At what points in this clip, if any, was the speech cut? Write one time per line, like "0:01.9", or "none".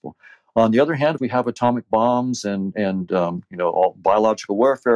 0:01.2